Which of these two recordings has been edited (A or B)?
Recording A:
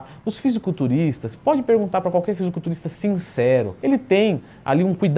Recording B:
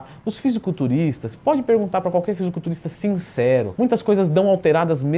B